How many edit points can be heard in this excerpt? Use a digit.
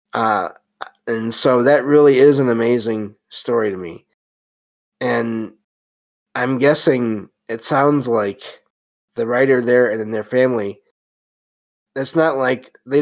0